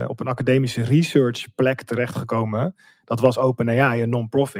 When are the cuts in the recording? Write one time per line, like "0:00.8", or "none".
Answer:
none